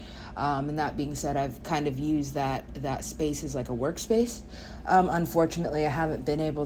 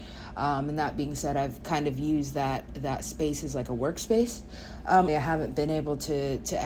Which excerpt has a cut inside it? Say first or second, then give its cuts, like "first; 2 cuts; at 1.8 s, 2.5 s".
second; 1 cut; at 5.1 s